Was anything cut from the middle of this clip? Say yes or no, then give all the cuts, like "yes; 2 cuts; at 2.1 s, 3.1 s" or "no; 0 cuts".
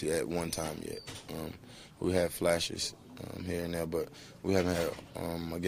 no; 0 cuts